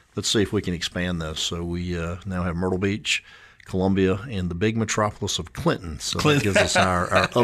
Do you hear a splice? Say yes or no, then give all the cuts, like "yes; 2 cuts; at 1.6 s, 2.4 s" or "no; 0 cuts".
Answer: no; 0 cuts